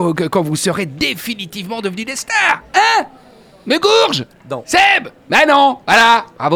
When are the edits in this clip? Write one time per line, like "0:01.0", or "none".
none